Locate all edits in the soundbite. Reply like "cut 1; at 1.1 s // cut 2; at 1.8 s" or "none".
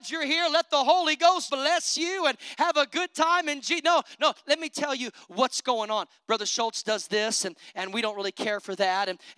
cut 1; at 1.5 s